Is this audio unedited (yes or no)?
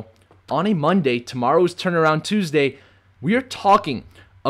no